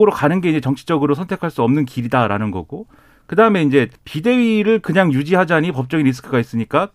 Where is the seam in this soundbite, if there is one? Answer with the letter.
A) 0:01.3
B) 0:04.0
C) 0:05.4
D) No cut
B